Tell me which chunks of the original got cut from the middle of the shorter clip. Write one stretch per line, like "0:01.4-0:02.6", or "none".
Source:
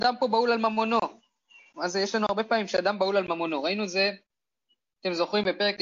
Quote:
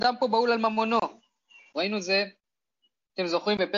0:01.7-0:03.6